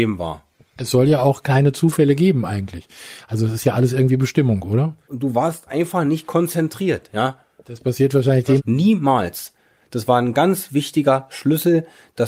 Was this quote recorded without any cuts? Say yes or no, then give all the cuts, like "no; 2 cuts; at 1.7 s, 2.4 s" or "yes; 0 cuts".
no; 2 cuts; at 5.0 s, 8.6 s